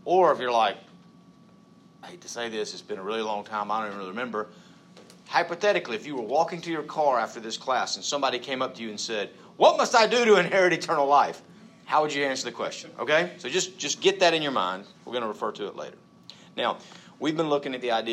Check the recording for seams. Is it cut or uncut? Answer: uncut